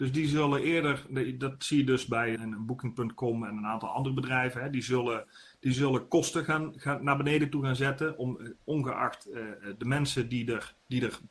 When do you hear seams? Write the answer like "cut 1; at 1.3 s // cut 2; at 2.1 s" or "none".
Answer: cut 1; at 2.4 s